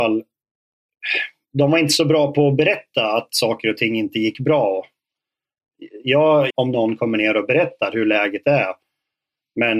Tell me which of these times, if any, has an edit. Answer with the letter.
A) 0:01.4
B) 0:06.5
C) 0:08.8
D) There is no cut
B